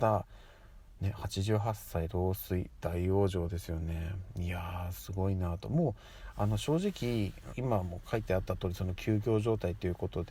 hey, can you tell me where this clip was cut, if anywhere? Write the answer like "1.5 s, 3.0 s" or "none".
7.5 s

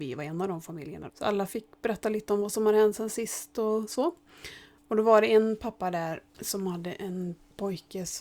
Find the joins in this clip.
1.1 s, 6.3 s

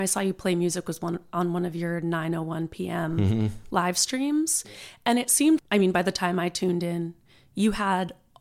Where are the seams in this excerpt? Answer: 5.6 s

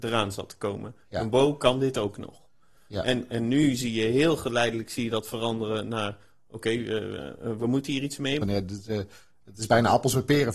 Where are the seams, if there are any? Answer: 8.4 s

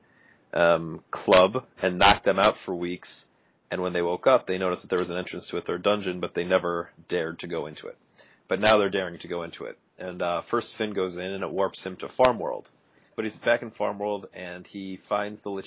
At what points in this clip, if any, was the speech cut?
13.1 s

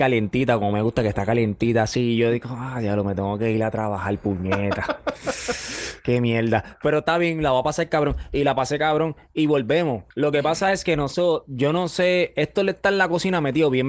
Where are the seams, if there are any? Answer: 10.1 s

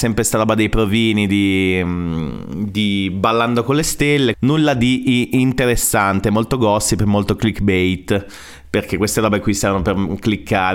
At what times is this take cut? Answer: 4.3 s

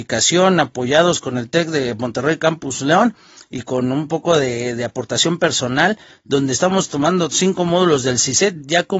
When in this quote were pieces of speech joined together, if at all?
6.1 s

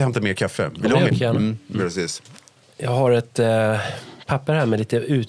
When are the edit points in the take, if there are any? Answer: 1.1 s

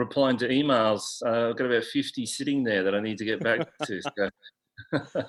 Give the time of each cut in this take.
none

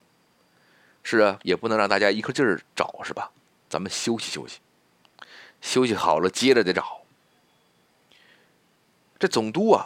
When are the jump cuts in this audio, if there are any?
none

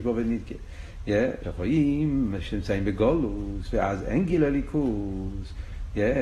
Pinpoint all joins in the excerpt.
1.4 s

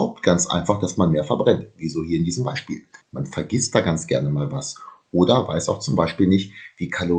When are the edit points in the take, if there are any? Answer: 3.0 s

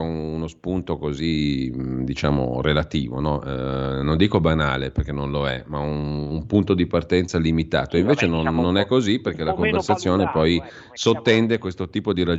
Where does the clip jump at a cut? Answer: none

